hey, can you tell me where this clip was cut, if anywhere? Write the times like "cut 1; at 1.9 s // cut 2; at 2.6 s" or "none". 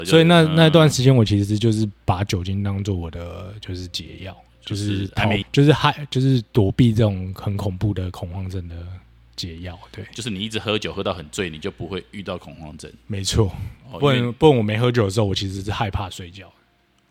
cut 1; at 5.4 s